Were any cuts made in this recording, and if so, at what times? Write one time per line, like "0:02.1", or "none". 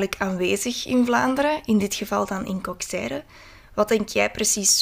none

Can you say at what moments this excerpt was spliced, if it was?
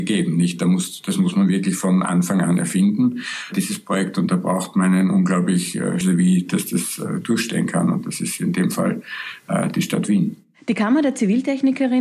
0:06.0

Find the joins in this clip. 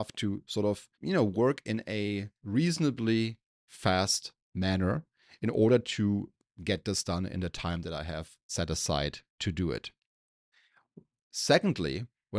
0:00.9
0:04.4

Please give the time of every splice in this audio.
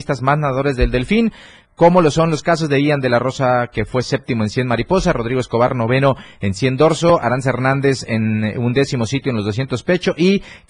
none

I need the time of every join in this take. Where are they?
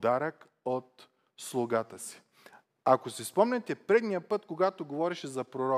none

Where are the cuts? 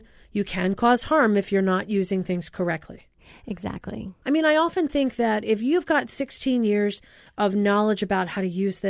0:04.2

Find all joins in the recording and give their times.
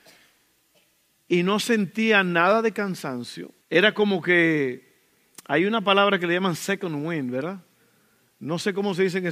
0:03.6

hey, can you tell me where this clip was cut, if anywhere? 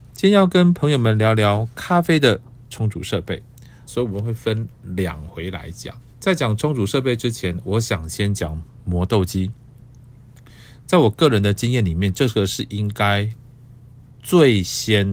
0:03.9
0:06.1

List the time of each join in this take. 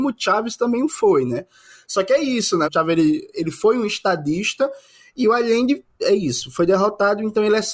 0:02.6

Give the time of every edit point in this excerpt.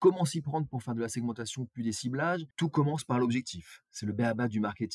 0:02.5

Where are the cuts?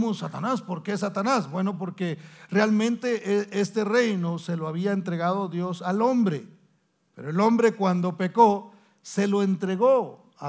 none

